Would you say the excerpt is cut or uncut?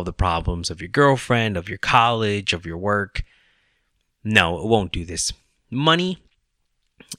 uncut